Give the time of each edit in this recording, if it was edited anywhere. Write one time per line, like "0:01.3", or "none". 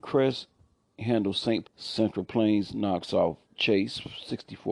0:01.6
0:03.4